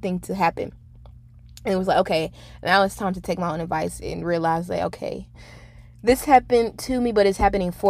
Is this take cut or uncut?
uncut